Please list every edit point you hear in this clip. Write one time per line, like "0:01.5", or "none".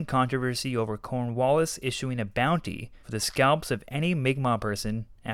0:03.0

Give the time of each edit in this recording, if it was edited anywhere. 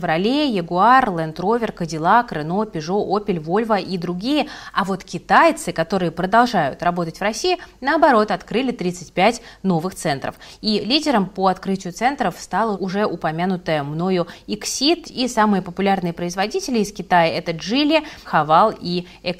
0:12.7
0:15.0
0:18.2

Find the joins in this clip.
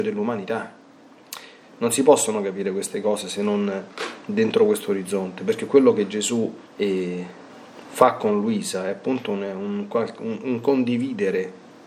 0:01.6
0:06.6

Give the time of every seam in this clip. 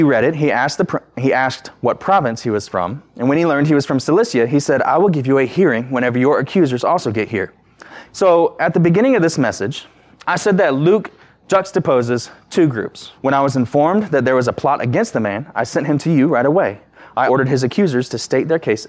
0:08.1
0:13.2
0:17.3

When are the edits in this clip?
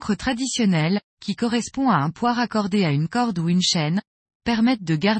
0:04.2

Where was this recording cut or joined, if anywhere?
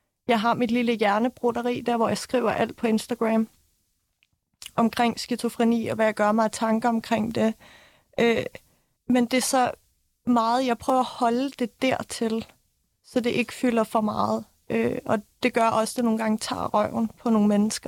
0:09.0

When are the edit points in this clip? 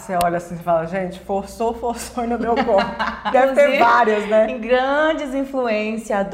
0:03.3

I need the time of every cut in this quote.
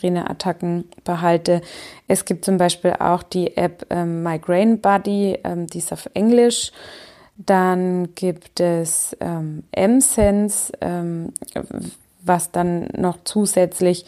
none

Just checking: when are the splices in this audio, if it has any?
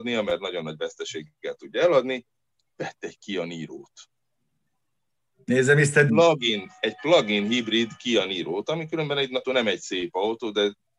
0:06.1
0:09.4

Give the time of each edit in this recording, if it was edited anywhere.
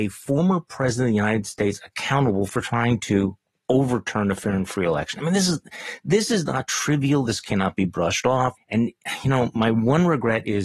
0:07.3
0:08.6

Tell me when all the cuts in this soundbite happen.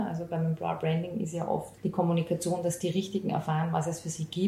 0:01.8

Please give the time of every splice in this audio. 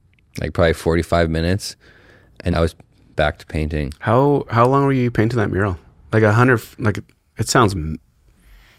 0:02.5

